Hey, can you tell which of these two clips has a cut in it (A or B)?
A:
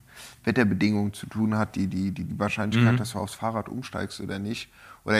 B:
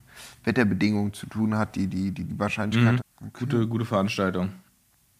B